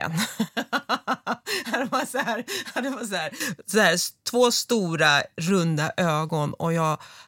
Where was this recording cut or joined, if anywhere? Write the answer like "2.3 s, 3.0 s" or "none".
none